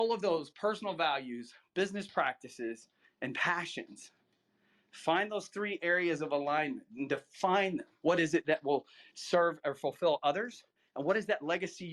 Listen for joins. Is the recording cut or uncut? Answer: cut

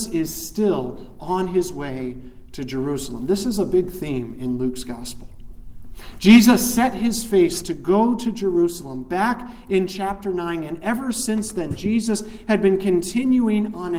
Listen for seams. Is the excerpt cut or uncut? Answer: uncut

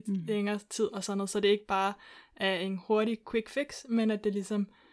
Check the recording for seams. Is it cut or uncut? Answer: uncut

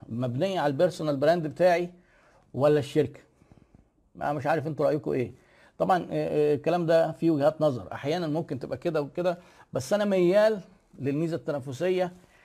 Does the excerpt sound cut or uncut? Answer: uncut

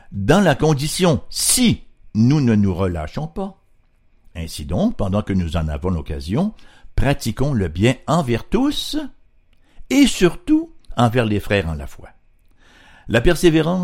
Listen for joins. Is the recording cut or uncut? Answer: uncut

